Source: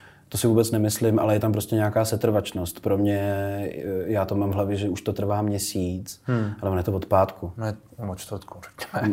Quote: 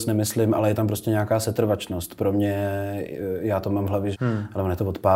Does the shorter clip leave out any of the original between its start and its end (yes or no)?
yes